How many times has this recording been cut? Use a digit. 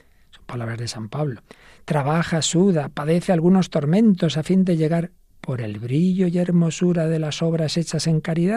0